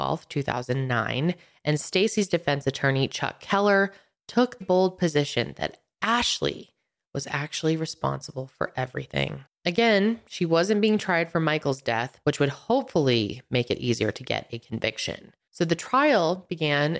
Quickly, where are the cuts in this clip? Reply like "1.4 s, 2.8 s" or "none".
4.6 s, 9.5 s, 12.2 s